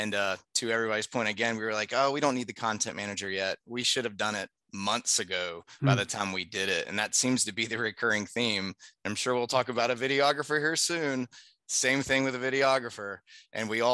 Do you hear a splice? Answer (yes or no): no